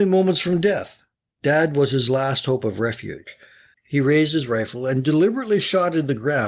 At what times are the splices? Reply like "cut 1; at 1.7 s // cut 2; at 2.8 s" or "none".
cut 1; at 3.7 s